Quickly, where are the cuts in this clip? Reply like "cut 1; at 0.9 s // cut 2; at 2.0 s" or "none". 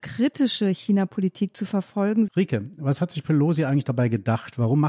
cut 1; at 2.3 s